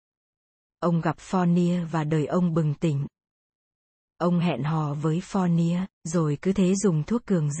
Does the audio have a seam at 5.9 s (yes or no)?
yes